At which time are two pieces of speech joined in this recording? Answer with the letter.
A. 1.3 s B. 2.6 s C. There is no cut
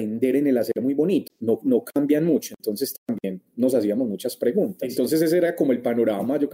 A